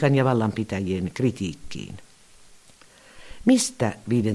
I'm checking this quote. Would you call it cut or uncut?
cut